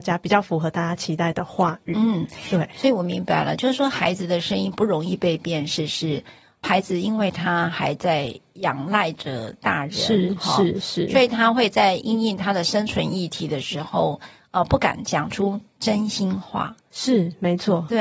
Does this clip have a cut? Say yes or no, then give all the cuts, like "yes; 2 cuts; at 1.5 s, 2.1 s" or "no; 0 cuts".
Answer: no; 0 cuts